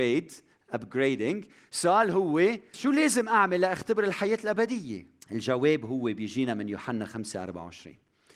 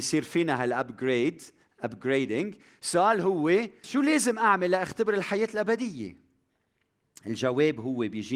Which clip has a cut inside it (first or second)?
first